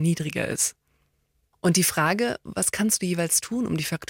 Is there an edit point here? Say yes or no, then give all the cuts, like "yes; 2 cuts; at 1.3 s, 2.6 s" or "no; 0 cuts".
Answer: no; 0 cuts